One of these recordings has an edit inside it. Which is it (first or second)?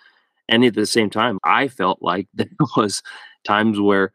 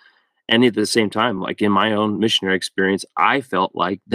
first